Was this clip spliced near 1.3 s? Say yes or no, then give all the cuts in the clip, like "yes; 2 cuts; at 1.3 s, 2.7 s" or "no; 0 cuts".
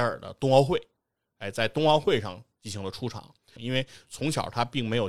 no; 1 cut; at 3.6 s